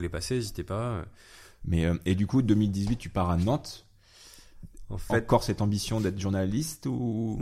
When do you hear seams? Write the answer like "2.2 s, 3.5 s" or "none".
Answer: 1.6 s